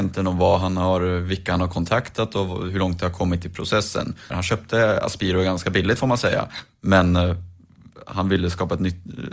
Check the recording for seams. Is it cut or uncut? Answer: cut